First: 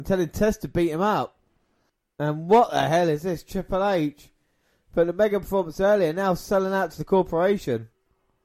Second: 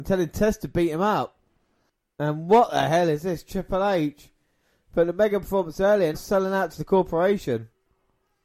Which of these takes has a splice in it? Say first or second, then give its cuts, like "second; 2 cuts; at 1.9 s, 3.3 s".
second; 1 cut; at 6.1 s